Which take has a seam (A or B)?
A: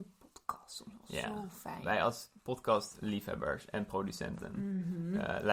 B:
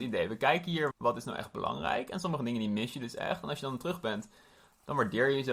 B